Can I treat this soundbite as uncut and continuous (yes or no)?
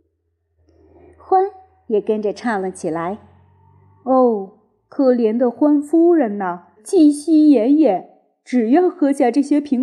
no